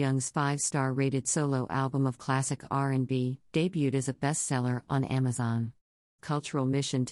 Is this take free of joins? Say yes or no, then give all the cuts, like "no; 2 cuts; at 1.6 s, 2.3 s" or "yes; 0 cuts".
no; 2 cuts; at 3.5 s, 6.2 s